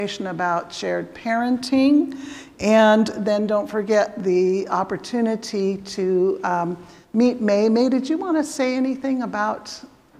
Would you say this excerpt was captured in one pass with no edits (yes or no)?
yes